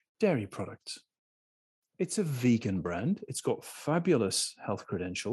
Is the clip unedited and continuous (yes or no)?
no